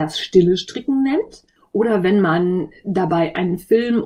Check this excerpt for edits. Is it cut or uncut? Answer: cut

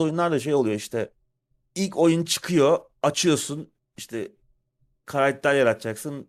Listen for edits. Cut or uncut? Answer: uncut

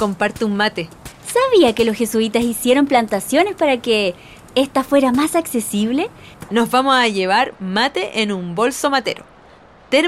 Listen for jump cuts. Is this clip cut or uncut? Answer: cut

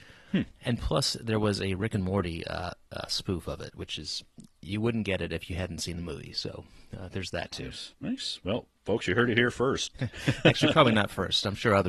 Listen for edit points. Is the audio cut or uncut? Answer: cut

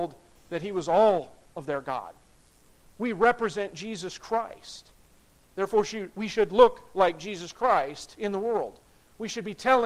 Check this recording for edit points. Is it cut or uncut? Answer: cut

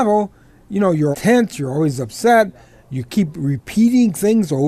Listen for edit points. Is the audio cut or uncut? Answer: cut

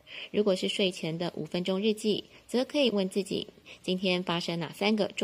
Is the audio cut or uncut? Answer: cut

